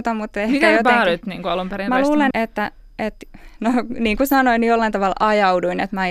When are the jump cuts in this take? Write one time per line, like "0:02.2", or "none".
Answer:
0:02.3